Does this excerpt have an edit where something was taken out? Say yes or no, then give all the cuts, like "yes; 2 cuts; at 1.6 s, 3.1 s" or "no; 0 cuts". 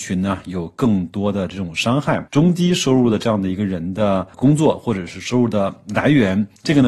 yes; 1 cut; at 2.3 s